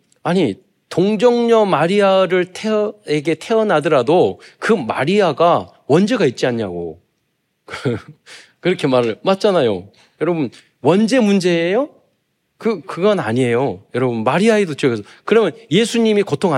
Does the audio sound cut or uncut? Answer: cut